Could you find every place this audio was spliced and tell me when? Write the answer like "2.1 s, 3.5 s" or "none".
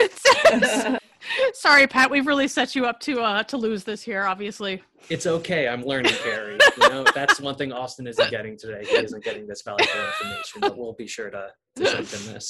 none